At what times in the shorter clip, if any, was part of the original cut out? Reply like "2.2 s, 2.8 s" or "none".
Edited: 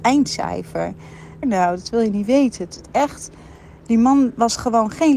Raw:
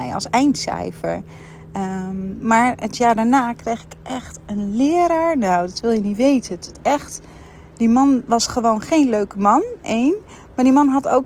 1.4 s